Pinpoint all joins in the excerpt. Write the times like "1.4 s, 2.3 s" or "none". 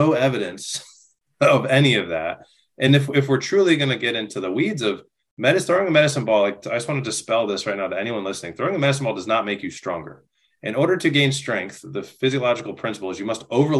none